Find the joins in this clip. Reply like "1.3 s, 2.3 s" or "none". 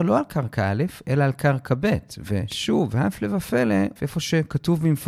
4.0 s

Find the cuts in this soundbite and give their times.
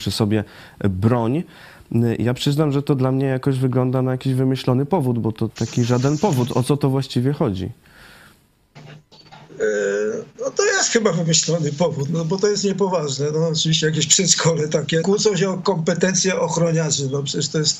5.5 s, 15.0 s

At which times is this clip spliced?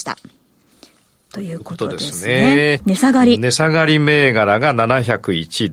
2.8 s

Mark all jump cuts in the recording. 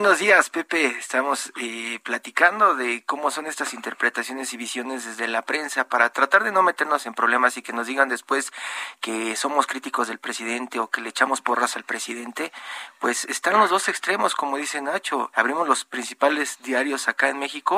15.3 s

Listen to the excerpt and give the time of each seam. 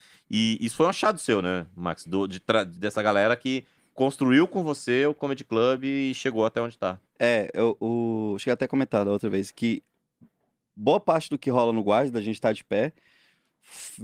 7.1 s

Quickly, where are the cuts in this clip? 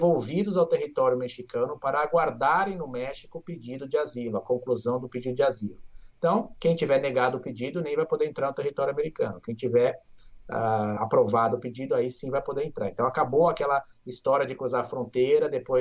11.0 s

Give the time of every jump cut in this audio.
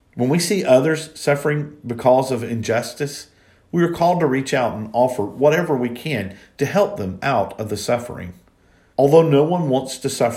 8.9 s

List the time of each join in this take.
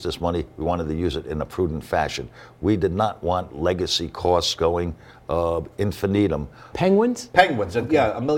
6.7 s

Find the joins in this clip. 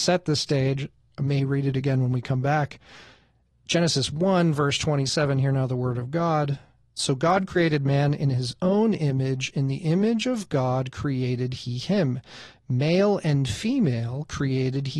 none

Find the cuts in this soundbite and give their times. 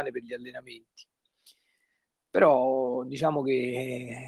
none

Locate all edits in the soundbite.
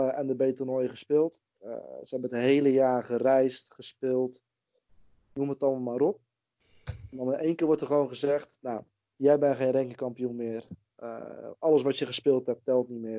1.6 s

